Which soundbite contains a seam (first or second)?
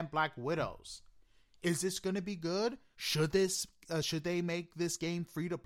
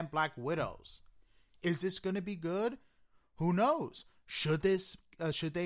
first